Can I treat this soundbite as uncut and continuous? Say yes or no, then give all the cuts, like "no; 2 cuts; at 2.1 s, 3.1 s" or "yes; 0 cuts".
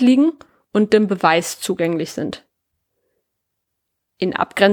yes; 0 cuts